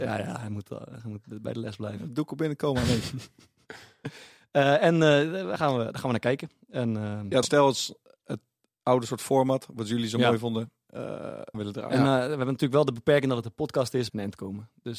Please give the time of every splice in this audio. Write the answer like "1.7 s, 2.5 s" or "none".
7.4 s, 11.5 s, 14.1 s